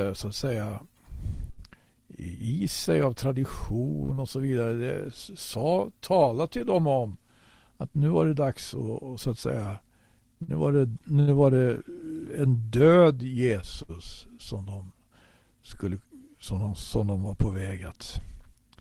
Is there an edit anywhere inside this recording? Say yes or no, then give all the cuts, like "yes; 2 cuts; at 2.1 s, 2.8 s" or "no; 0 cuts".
no; 0 cuts